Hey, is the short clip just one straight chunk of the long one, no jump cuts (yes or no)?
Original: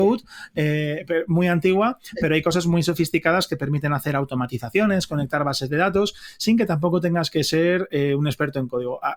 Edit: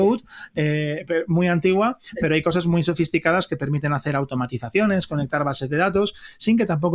yes